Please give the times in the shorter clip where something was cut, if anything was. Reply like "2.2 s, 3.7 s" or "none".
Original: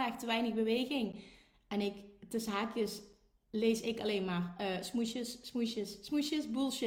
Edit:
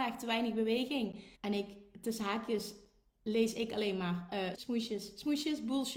1.3 s, 4.5 s